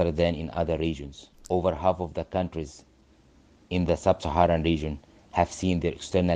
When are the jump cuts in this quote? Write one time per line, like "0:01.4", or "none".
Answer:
0:01.3